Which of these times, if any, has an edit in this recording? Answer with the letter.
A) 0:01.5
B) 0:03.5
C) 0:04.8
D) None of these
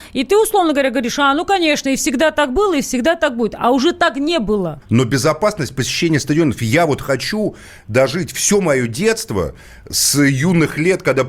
C